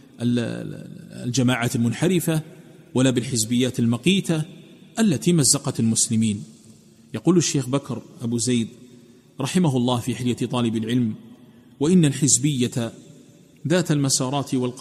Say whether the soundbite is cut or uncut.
uncut